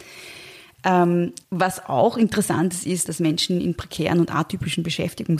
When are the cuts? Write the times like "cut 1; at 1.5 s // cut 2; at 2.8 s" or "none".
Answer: cut 1; at 1.4 s // cut 2; at 3.1 s